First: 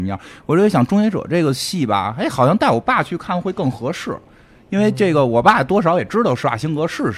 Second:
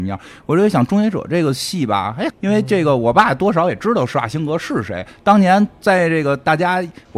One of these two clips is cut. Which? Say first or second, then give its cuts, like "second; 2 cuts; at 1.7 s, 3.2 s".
second; 1 cut; at 2.3 s